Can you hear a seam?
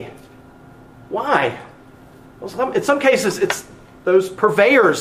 no; 0 cuts

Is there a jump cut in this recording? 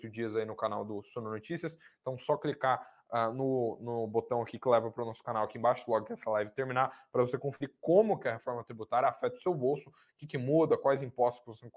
no; 0 cuts

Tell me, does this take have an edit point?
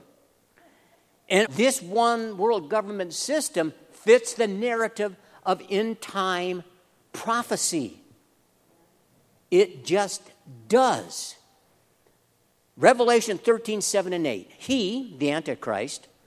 yes; 1 cut; at 1.4 s

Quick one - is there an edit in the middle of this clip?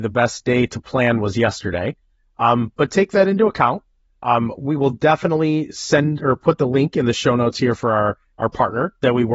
no; 0 cuts

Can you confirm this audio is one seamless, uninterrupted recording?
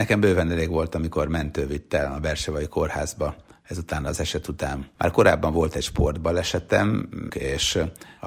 no; 2 cuts; at 4.9 s, 7.3 s

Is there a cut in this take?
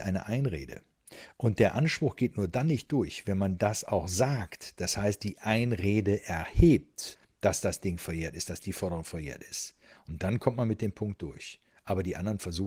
no; 0 cuts

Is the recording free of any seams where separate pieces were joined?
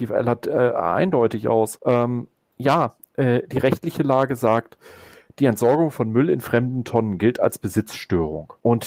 yes; 0 cuts

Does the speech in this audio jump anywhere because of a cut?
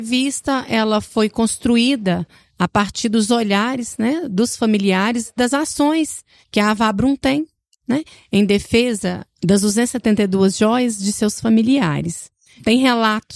no; 0 cuts

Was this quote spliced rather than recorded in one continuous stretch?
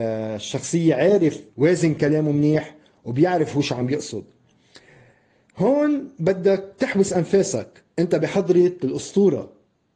yes; 2 cuts; at 1.5 s, 7.9 s

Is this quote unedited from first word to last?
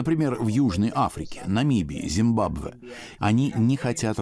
no; 1 cut; at 3.2 s

